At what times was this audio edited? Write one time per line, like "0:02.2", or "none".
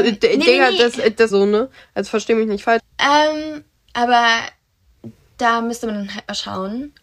0:01.3
0:02.8